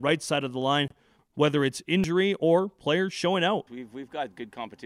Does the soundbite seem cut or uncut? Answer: cut